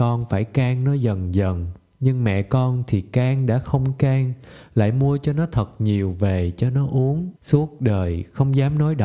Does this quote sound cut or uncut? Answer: cut